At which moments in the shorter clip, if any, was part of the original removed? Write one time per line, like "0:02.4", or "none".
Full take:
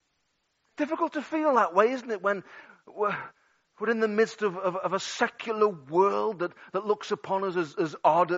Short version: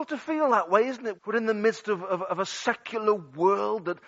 0:01.1